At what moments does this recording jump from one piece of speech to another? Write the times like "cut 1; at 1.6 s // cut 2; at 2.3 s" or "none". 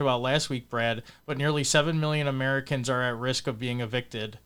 none

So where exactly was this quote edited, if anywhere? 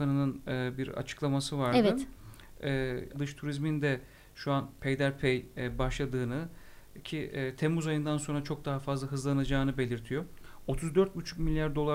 cut 1; at 3.1 s

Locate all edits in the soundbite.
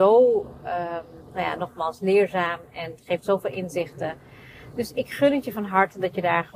none

